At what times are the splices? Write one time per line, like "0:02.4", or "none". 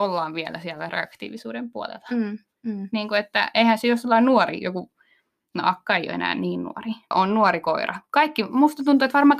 0:07.1